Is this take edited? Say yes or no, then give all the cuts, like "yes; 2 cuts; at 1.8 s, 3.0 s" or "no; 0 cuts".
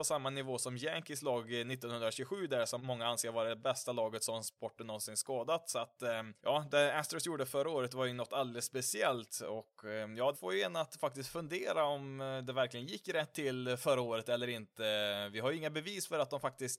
yes; 3 cuts; at 2.8 s, 6.4 s, 10.3 s